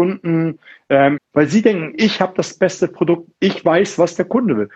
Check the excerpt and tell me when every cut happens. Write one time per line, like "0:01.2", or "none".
0:01.2